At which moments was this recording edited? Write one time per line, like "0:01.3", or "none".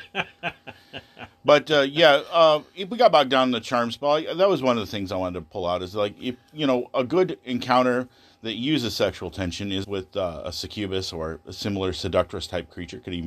0:09.8

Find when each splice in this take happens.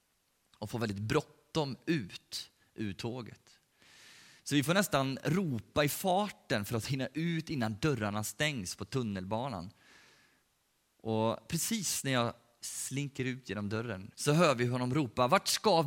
0:14.1

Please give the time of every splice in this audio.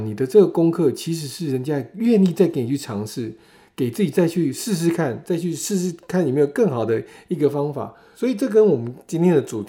none

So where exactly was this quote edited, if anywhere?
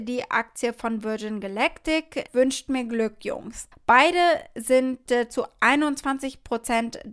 0:02.3
0:03.7

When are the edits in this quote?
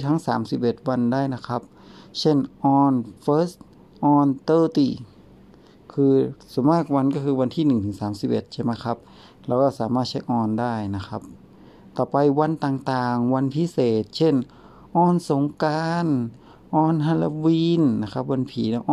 0:03.2

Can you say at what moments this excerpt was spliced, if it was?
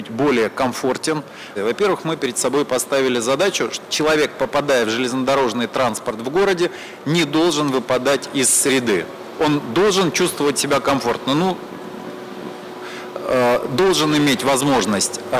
0:01.6

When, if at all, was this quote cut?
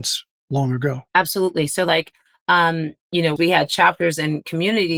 0:01.1
0:03.4

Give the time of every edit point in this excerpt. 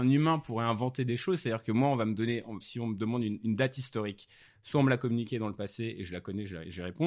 0:02.6

